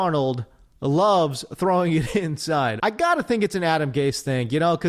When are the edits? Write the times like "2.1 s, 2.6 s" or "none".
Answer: 2.8 s